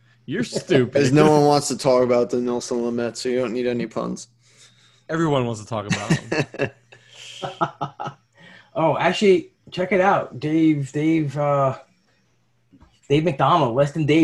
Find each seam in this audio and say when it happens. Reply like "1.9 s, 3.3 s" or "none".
none